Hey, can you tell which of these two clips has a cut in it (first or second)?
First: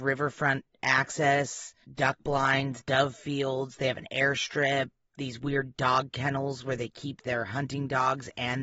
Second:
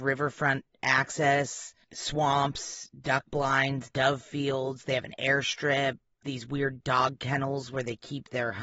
first